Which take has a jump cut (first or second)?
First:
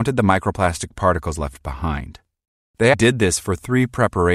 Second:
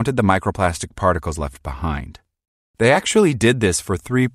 first